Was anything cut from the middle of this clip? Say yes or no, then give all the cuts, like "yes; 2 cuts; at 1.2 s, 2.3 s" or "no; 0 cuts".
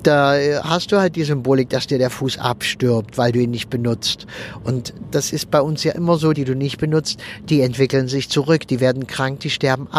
yes; 1 cut; at 6.3 s